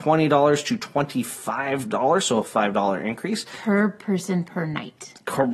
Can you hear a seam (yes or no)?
no